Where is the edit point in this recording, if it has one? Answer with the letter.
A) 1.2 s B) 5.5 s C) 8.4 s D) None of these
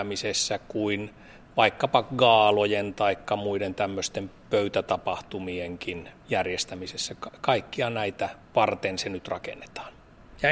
C